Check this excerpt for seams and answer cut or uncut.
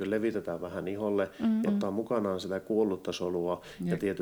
cut